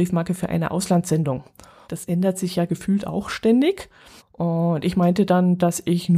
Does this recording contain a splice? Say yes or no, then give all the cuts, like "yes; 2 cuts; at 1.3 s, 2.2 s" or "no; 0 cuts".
yes; 2 cuts; at 1.8 s, 4.2 s